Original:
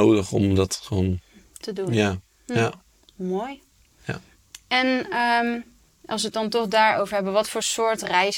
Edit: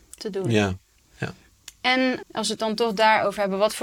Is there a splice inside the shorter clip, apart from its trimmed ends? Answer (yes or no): yes